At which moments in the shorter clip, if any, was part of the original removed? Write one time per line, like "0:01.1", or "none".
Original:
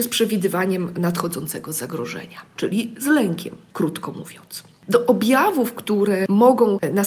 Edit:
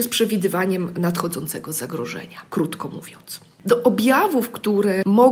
0:02.5